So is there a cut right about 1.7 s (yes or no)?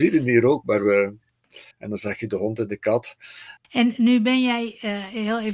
yes